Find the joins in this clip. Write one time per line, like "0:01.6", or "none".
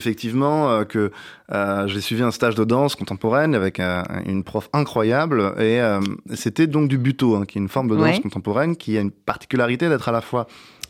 none